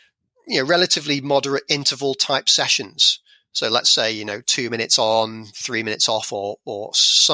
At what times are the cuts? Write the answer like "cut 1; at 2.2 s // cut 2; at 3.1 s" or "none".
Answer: none